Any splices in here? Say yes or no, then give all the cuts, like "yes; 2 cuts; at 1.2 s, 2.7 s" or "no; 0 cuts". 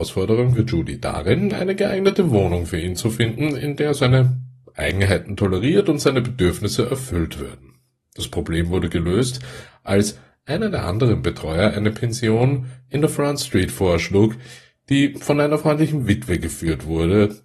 no; 0 cuts